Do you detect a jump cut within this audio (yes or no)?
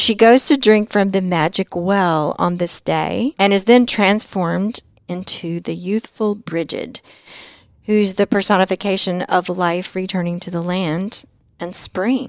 no